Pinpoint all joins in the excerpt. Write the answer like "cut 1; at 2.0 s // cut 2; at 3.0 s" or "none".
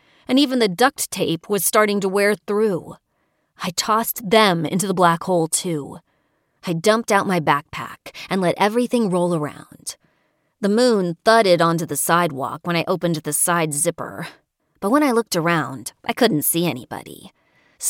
cut 1; at 6.6 s // cut 2; at 14.6 s